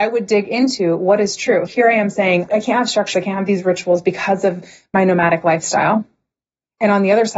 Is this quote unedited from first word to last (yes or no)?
no